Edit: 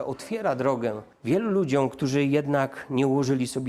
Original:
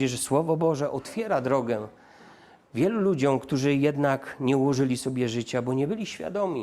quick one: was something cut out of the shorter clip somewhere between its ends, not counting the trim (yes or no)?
yes